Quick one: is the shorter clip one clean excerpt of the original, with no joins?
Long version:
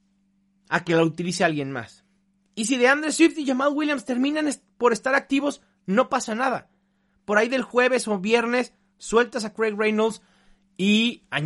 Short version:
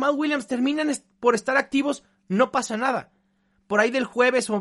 yes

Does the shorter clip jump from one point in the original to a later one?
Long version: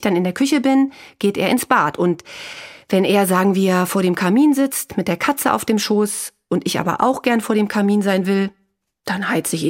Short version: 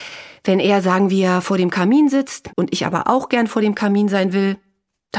yes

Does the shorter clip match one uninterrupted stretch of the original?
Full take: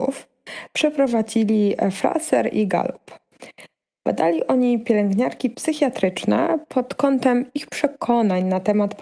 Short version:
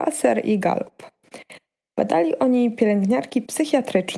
yes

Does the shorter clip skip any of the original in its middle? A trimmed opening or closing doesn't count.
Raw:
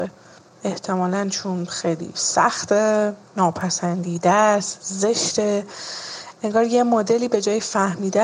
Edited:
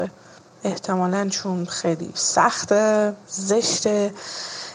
yes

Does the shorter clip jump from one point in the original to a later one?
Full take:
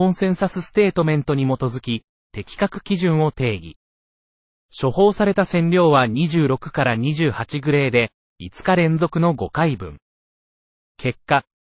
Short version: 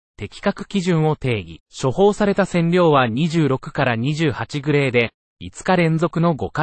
yes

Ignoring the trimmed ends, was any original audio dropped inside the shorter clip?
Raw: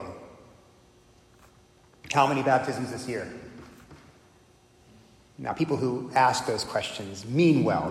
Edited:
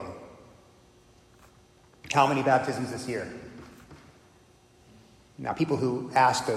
no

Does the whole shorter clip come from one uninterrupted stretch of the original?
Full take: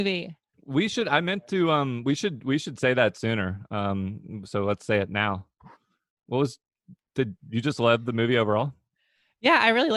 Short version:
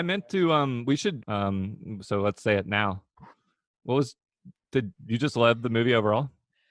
no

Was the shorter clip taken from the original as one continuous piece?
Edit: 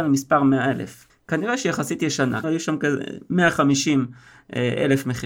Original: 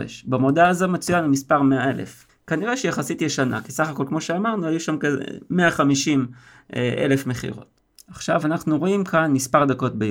no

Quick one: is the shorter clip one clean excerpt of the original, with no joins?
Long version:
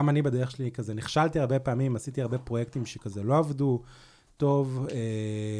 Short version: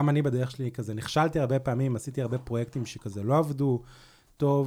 yes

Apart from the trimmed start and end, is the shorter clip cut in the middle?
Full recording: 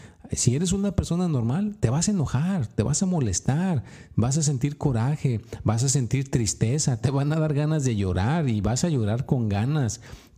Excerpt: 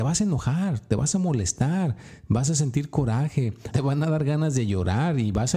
yes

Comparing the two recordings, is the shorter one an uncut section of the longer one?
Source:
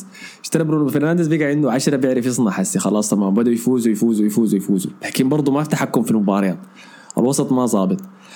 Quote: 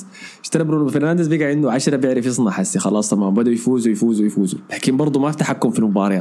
no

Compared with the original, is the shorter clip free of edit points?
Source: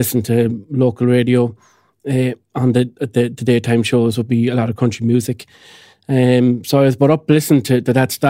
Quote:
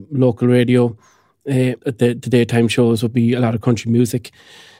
no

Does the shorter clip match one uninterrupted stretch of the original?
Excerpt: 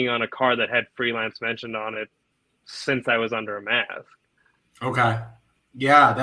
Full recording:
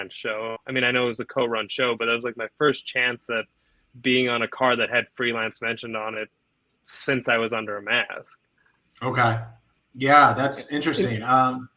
yes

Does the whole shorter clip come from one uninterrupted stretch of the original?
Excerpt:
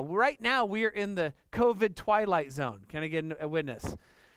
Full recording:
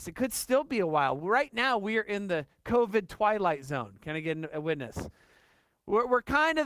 yes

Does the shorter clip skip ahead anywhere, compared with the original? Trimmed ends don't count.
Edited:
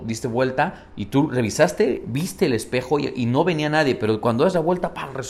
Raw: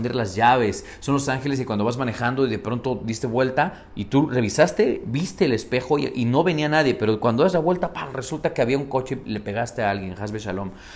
no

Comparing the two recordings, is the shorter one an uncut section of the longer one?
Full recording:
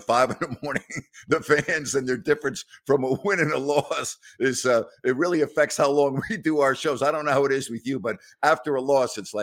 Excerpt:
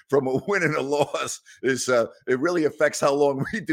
yes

